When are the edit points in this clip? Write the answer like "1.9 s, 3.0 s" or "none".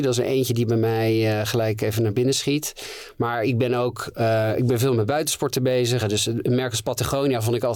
6.0 s